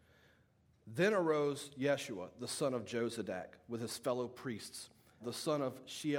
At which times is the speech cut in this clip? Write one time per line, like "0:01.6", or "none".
0:05.2